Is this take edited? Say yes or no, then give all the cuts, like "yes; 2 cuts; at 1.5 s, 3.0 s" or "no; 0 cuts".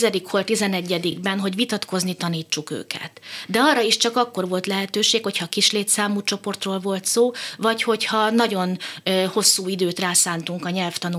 no; 0 cuts